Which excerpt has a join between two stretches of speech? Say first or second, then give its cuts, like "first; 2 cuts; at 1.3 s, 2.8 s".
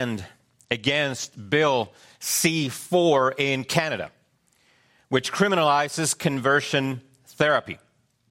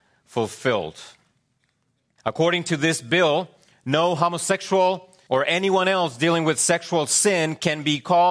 second; 2 cuts; at 2.2 s, 5.3 s